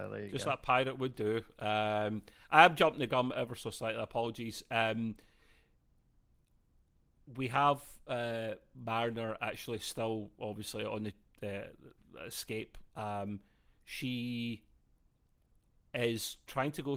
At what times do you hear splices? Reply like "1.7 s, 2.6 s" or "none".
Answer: none